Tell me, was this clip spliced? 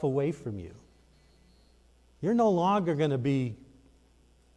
no; 0 cuts

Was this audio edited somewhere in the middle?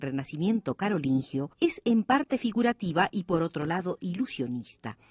yes; 1 cut; at 1.5 s

